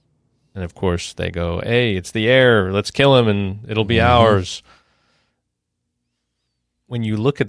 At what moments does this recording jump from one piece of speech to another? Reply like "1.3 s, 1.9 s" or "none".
none